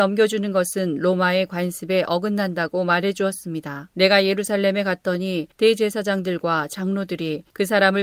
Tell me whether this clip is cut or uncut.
cut